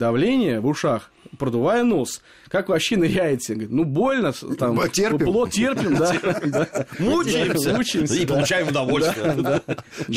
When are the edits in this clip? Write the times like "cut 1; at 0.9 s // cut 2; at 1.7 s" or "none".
none